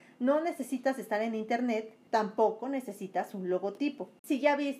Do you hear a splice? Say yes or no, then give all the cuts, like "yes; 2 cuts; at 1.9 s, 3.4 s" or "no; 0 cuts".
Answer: yes; 1 cut; at 2.1 s